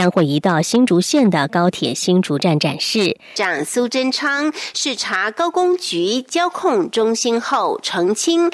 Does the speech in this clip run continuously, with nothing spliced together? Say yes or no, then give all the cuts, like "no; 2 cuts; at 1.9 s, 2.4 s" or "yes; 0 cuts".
no; 1 cut; at 3.4 s